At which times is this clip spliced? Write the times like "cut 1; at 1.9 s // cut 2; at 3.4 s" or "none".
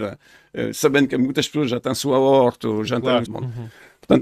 cut 1; at 3.3 s